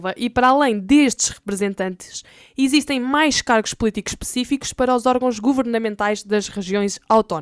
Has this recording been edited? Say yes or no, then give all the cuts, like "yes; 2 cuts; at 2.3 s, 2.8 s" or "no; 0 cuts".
no; 0 cuts